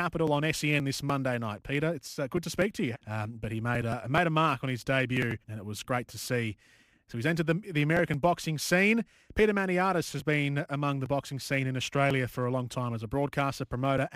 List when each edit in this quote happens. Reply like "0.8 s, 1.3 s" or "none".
2.9 s, 5.4 s

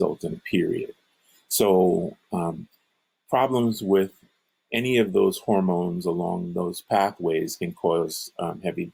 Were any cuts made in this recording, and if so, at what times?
none

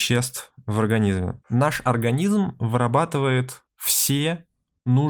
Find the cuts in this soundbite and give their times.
1.4 s, 3.7 s

